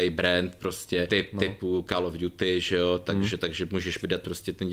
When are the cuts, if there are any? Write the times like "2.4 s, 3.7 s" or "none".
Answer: 1.1 s